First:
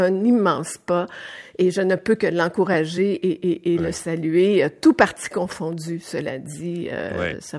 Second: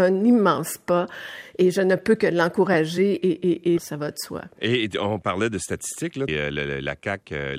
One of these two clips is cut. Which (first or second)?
second